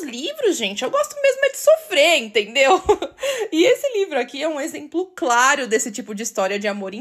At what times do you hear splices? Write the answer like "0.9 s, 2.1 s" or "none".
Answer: none